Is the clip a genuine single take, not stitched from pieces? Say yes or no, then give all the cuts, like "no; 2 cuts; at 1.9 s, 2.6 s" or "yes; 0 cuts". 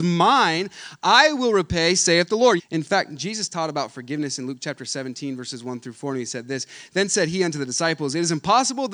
no; 1 cut; at 2.6 s